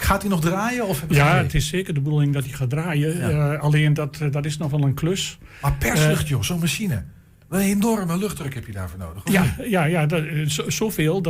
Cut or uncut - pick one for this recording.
uncut